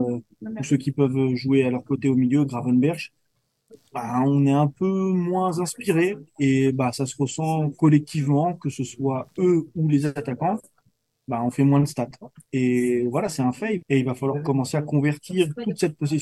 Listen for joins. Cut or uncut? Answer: cut